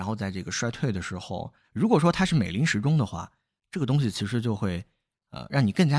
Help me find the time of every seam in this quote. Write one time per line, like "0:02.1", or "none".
0:01.6